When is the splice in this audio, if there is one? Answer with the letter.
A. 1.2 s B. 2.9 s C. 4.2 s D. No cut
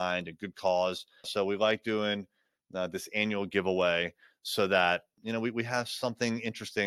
A